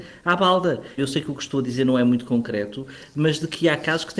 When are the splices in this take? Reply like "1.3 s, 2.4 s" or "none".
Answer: 1.0 s